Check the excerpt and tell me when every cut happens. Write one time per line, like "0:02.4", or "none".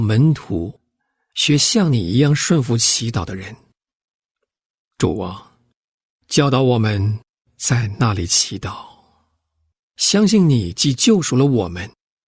none